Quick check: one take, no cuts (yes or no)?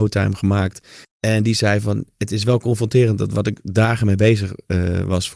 no